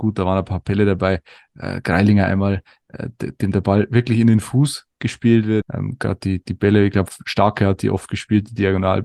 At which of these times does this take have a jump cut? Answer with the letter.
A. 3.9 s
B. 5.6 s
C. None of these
B